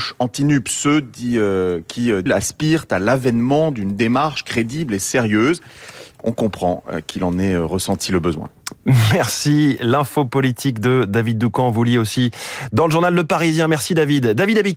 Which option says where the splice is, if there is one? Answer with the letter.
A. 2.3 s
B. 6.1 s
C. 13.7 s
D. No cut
A